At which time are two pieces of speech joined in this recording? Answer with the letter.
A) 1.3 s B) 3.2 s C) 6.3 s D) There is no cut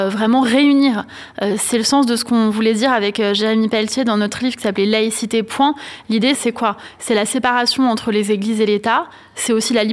C